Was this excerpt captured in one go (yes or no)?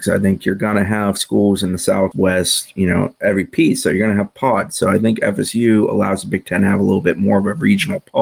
no